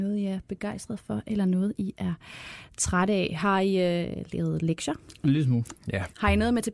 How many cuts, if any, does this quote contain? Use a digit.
1